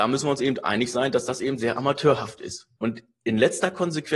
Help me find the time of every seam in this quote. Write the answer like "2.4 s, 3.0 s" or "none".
2.8 s